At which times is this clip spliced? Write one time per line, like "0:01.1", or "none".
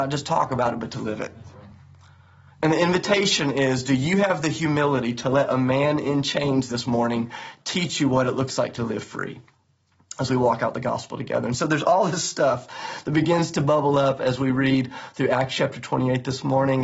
none